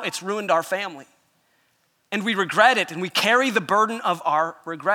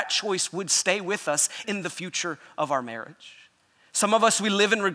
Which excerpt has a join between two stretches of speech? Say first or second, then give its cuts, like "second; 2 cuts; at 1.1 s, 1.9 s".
second; 1 cut; at 1.6 s